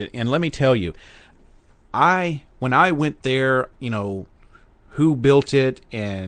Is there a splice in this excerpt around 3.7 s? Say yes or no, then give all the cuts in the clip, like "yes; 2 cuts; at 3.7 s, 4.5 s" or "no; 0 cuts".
yes; 1 cut; at 3.7 s